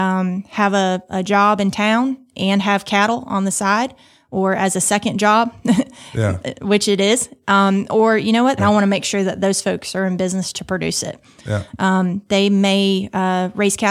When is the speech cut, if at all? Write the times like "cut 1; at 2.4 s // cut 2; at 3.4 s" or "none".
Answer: cut 1; at 8.6 s // cut 2; at 11.4 s